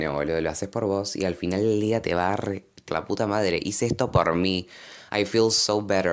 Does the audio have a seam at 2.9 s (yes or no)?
yes